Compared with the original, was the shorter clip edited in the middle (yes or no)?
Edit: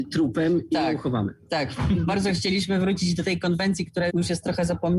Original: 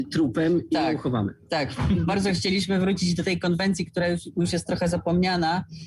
yes